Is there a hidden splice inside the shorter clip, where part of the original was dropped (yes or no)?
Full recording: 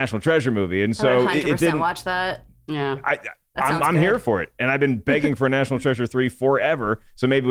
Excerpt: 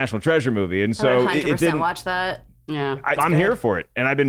yes